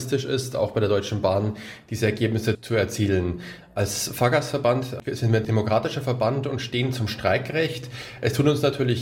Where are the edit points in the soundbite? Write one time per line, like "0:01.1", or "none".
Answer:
none